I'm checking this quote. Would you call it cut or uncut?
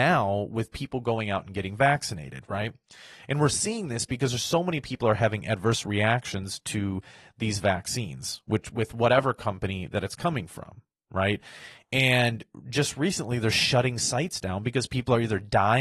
uncut